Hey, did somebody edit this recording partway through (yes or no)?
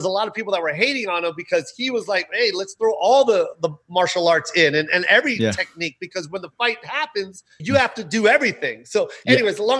yes